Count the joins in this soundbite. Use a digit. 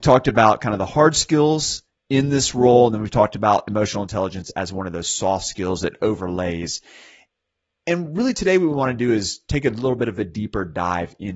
0